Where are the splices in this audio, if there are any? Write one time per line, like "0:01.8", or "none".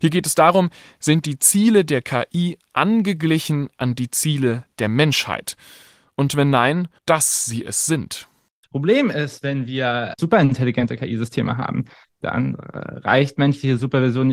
0:07.0